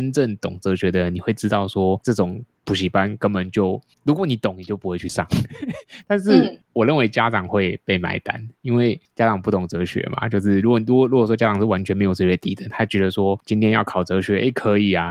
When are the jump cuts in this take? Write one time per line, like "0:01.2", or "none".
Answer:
0:13.4